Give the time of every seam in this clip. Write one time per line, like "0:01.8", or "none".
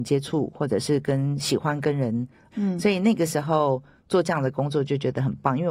0:02.5